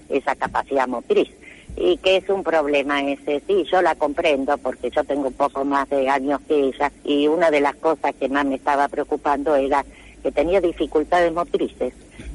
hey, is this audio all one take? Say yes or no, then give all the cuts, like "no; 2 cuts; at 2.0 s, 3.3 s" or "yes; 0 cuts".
no; 2 cuts; at 1.6 s, 7.0 s